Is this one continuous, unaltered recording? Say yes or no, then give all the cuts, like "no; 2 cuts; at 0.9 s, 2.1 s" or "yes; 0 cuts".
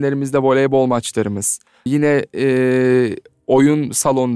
no; 1 cut; at 1.9 s